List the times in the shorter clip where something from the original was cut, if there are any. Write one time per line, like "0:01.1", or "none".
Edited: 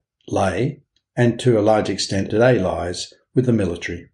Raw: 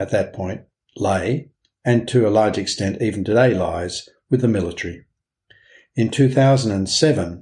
0:02.3